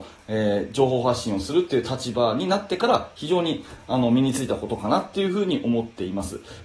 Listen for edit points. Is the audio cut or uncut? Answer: uncut